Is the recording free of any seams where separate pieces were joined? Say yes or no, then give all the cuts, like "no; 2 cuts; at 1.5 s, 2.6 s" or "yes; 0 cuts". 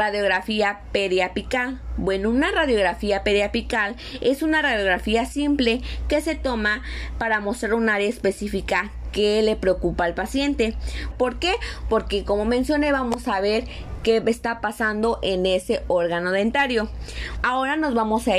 no; 2 cuts; at 11.1 s, 17.4 s